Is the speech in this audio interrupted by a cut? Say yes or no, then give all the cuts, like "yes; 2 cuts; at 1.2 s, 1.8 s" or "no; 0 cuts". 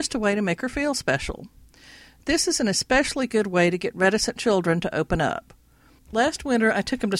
yes; 1 cut; at 6.0 s